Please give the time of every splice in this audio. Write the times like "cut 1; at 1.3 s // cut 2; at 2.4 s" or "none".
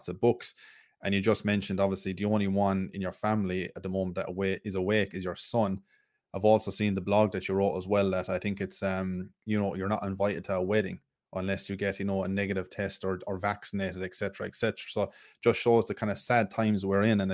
none